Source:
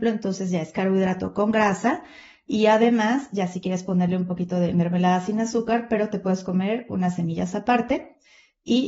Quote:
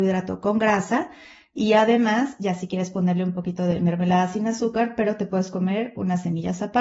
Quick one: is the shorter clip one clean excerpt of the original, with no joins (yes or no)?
yes